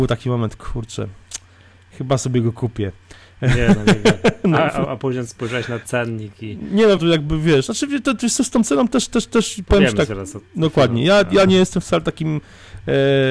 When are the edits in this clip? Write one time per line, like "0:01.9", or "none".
0:07.0